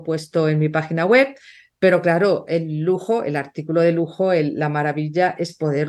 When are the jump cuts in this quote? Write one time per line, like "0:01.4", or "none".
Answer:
none